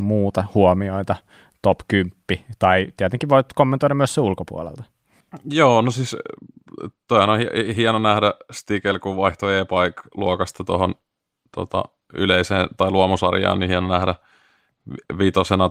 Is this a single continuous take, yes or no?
yes